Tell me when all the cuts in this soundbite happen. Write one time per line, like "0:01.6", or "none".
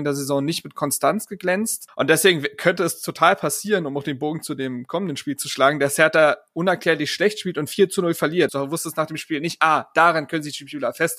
0:01.9
0:08.5